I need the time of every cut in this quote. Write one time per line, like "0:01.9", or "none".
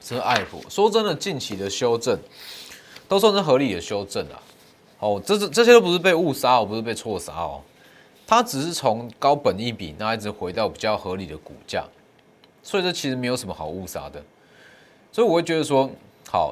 none